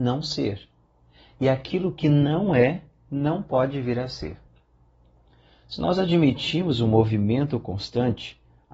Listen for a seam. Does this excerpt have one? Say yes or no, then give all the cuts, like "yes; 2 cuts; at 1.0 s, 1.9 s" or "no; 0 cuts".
no; 0 cuts